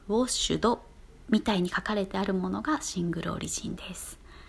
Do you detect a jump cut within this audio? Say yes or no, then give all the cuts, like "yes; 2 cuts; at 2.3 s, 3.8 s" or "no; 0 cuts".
no; 0 cuts